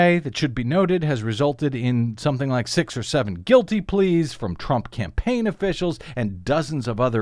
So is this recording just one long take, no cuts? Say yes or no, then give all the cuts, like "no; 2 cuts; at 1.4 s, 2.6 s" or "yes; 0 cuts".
yes; 0 cuts